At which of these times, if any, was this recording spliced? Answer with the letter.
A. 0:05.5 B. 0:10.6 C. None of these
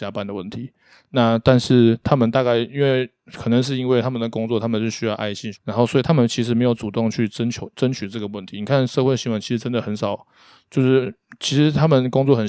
A